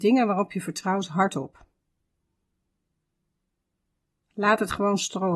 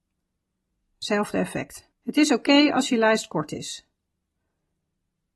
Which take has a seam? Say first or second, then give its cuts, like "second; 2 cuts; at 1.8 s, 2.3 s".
second; 1 cut; at 1.9 s